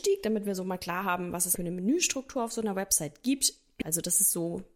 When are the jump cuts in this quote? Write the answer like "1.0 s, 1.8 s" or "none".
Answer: 1.6 s, 3.8 s